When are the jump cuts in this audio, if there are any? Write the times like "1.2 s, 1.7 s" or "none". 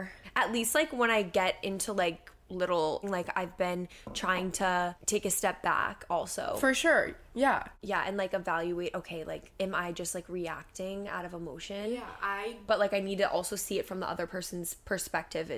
3.0 s